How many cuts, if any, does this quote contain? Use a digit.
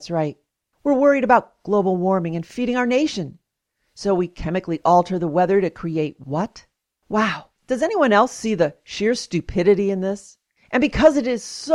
0